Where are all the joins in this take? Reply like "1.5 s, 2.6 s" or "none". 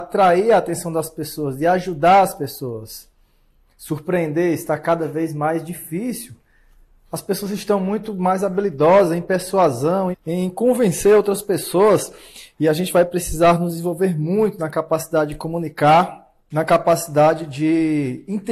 10.1 s, 16.4 s